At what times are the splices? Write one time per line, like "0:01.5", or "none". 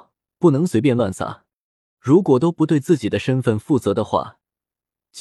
0:02.0